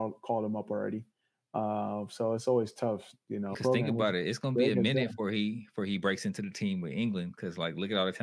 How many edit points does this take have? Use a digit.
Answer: 1